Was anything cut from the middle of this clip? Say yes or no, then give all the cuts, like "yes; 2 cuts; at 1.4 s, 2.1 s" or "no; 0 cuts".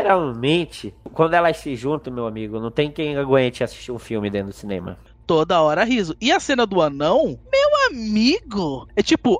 no; 0 cuts